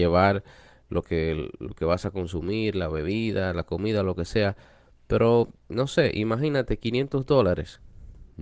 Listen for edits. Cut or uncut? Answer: uncut